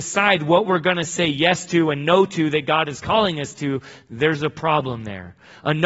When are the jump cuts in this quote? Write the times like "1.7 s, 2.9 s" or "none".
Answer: none